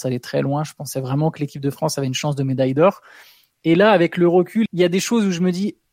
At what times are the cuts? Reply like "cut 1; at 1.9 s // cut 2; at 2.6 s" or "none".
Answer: cut 1; at 4.7 s